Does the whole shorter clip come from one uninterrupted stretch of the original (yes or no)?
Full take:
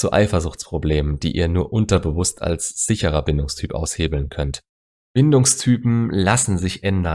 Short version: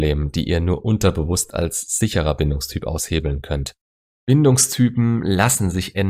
yes